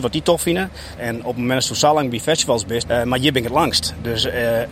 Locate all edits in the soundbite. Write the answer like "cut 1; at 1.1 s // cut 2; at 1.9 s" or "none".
cut 1; at 1.0 s // cut 2; at 2.8 s